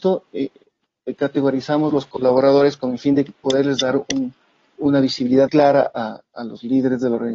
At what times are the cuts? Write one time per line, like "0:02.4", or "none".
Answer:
0:05.5